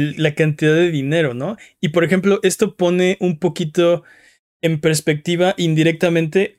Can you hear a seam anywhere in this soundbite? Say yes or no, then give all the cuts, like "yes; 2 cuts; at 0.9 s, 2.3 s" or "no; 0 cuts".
no; 0 cuts